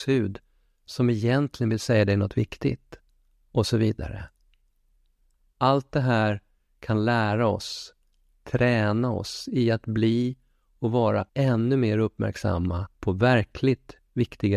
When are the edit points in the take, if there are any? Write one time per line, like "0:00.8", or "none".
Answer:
0:11.3
0:12.9

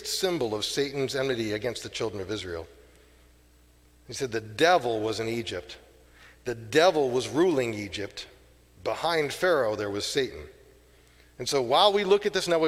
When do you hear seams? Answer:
none

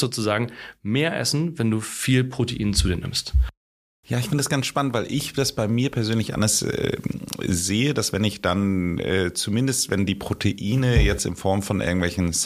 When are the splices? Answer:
none

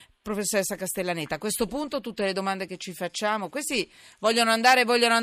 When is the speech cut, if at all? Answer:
none

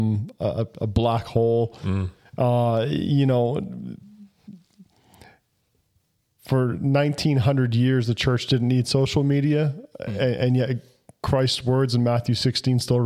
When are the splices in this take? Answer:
none

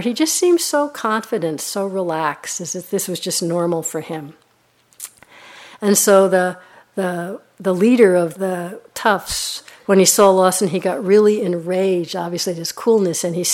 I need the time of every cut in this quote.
0:08.4

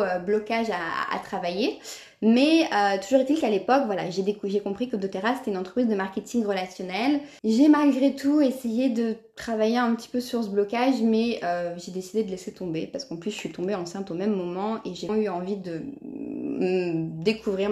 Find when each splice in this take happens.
0:07.4
0:15.1

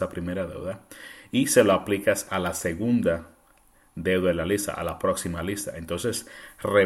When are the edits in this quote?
none

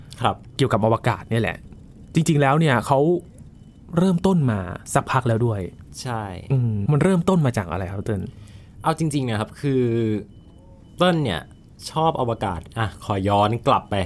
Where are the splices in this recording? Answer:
0:06.9

